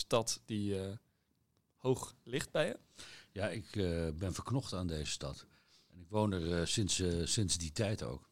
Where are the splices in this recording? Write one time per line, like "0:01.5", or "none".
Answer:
0:07.3